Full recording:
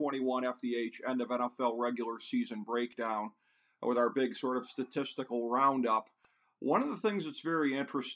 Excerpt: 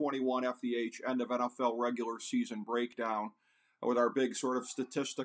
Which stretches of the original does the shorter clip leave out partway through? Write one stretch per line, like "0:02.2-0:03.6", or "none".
none